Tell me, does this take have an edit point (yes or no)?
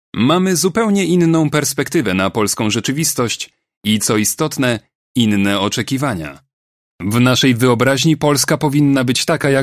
no